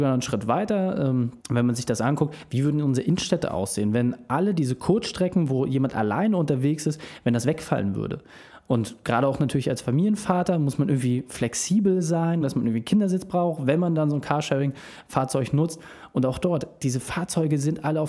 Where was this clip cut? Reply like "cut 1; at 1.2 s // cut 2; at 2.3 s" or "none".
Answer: cut 1; at 1.4 s // cut 2; at 12.4 s